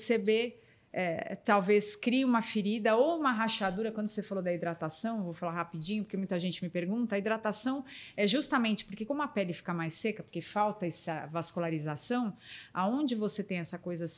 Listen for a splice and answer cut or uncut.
uncut